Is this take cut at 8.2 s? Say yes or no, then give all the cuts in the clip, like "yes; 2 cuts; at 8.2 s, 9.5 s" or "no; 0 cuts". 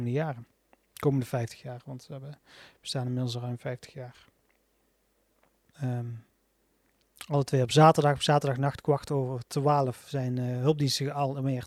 no; 1 cut; at 5.7 s